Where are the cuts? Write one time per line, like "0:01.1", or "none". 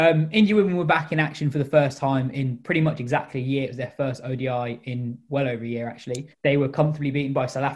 0:06.3